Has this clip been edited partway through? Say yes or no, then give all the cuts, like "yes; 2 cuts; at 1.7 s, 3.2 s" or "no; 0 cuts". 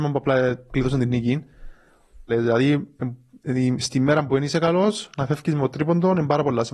yes; 1 cut; at 2.3 s